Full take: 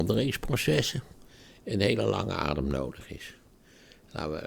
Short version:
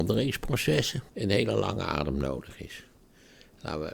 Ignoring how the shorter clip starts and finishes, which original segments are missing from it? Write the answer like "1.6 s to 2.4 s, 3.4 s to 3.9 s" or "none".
1.1 s to 1.6 s